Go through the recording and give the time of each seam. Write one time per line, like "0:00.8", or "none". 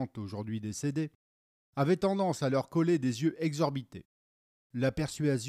0:04.5